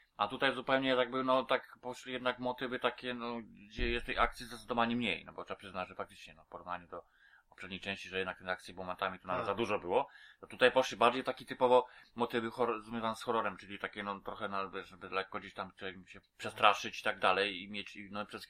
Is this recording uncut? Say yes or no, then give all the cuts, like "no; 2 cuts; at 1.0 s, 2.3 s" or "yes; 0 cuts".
no; 1 cut; at 16.2 s